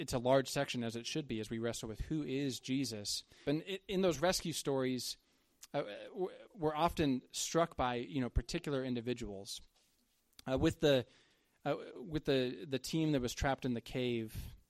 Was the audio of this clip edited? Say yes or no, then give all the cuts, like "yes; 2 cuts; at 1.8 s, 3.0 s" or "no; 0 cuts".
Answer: yes; 1 cut; at 3.4 s